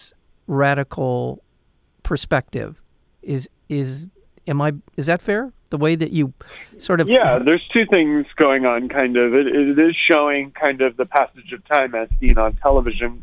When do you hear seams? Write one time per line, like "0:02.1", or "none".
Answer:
none